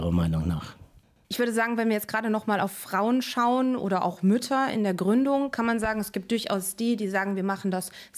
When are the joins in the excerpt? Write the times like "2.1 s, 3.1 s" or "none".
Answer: none